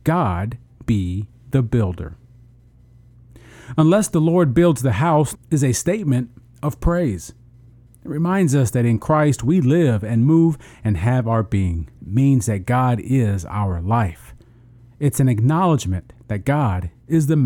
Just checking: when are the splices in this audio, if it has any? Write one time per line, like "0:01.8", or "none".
0:05.3
0:12.0